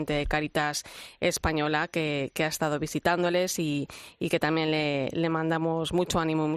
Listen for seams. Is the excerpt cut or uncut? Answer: uncut